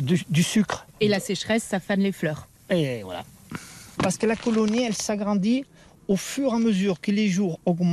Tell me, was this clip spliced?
yes; 1 cut; at 4.0 s

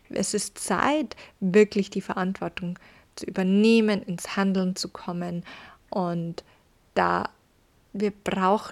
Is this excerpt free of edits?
yes; 0 cuts

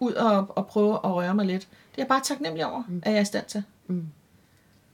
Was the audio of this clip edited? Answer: no; 0 cuts

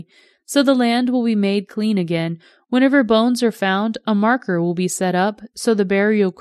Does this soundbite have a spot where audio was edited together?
no; 0 cuts

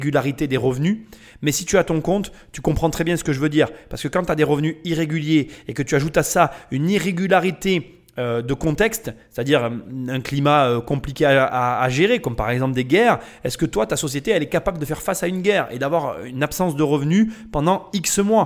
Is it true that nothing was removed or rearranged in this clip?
yes; 0 cuts

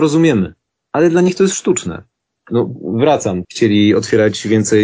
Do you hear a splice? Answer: yes; 2 cuts; at 2.4 s, 3.4 s

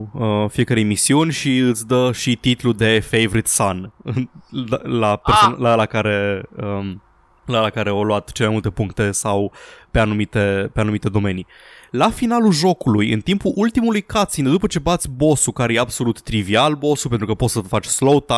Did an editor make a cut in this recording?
no; 0 cuts

